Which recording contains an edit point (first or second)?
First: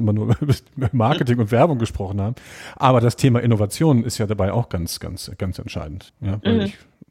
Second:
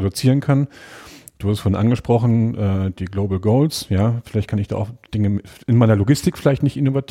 first